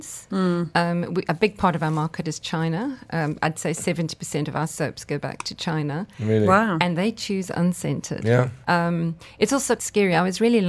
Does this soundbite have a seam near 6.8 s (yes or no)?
no